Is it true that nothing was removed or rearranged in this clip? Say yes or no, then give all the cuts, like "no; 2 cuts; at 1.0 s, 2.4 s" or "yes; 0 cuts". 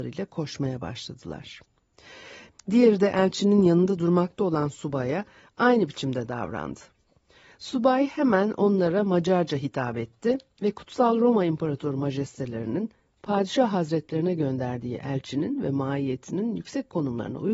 no; 1 cut; at 2.5 s